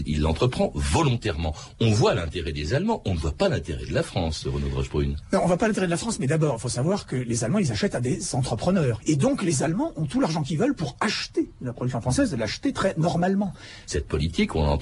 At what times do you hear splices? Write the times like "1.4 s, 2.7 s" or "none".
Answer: 9.0 s, 13.9 s

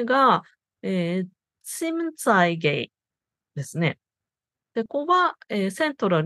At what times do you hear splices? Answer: 4.9 s

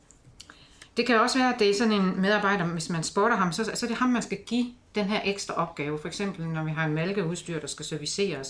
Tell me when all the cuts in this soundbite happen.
none

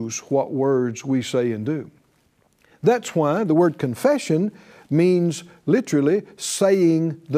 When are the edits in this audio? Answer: none

